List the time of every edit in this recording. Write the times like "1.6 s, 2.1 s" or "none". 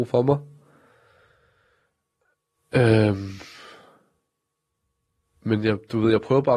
none